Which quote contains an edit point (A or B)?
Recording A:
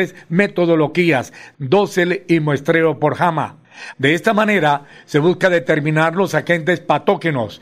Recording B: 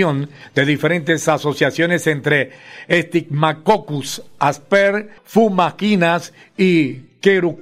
A